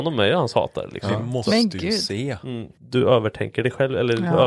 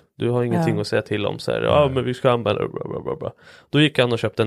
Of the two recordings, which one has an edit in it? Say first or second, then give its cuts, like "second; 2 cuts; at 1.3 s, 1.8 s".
first; 1 cut; at 2.8 s